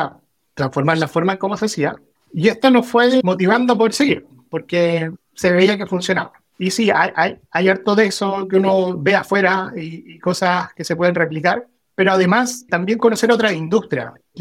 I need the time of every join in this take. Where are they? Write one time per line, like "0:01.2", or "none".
0:06.5